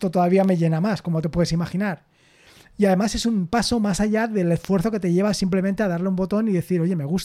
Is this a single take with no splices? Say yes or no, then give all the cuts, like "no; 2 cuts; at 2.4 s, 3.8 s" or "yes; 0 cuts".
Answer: yes; 0 cuts